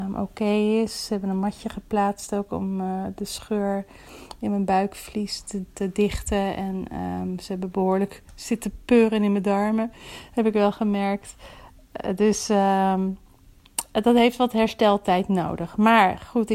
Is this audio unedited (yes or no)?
yes